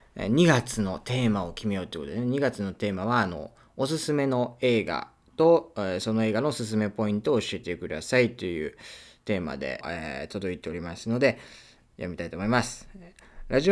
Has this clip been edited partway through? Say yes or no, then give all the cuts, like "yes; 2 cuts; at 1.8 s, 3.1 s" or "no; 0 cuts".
yes; 1 cut; at 9.8 s